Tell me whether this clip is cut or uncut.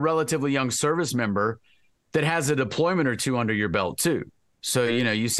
uncut